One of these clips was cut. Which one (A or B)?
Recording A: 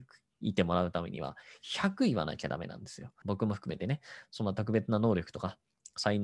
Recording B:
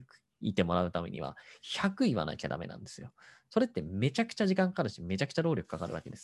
A